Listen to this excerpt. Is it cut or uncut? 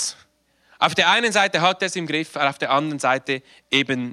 uncut